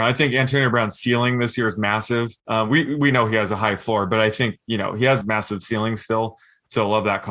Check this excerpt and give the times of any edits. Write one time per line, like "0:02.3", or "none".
0:02.4
0:05.2